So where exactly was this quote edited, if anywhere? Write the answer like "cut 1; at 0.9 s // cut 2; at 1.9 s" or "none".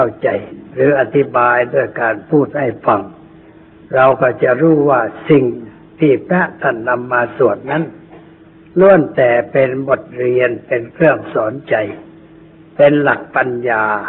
none